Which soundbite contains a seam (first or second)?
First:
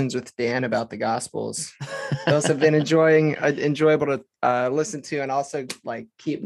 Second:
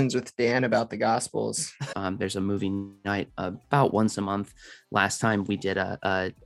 second